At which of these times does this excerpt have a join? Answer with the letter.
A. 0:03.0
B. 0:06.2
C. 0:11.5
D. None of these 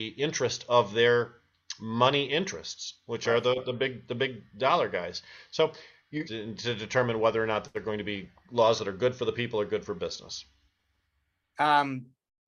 B